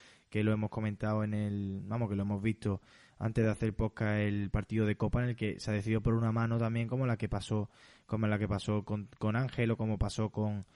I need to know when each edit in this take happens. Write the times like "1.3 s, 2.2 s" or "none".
none